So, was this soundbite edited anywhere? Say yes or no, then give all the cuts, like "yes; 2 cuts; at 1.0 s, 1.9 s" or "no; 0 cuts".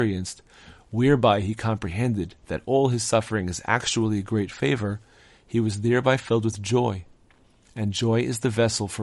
no; 0 cuts